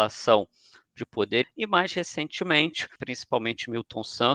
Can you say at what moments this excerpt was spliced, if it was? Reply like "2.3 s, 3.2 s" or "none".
1.4 s, 3.0 s